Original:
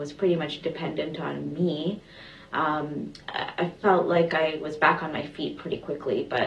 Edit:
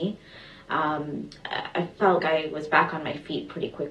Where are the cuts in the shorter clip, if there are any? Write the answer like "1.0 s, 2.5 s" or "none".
2.2 s